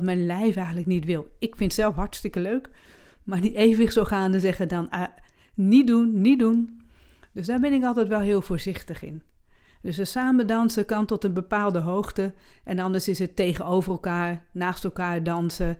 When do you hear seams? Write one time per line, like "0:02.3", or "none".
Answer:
0:04.9